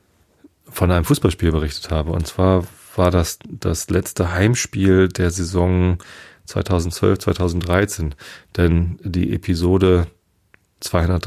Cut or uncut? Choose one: uncut